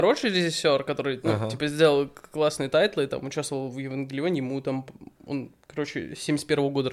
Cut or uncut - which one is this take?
uncut